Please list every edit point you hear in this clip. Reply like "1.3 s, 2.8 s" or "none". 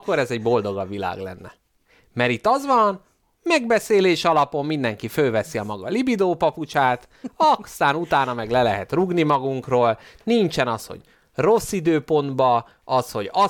none

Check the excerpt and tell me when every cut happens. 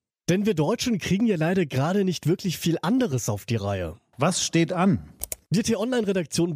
4.1 s

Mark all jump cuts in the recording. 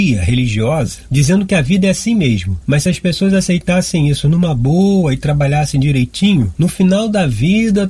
2.6 s

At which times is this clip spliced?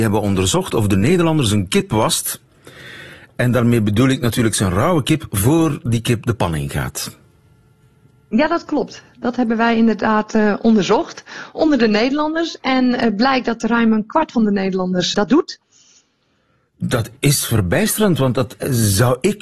15.1 s, 17.2 s

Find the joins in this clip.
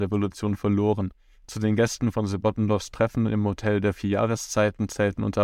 1.4 s

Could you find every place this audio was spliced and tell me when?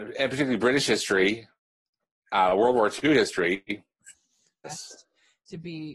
4.6 s

